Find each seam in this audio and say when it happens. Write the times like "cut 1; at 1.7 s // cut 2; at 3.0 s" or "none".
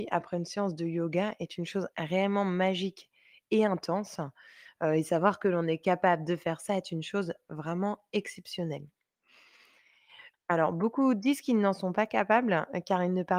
cut 1; at 10.3 s